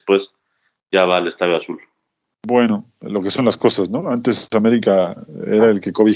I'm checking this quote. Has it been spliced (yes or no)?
no